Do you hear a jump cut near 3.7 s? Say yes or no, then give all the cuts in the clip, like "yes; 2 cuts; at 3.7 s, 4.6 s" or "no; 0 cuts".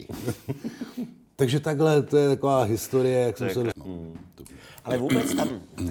yes; 1 cut; at 3.7 s